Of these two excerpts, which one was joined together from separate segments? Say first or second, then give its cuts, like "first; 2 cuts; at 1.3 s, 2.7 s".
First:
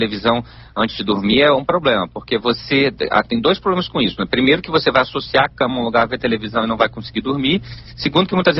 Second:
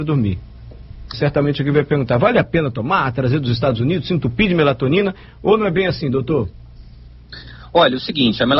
second; 1 cut; at 1.1 s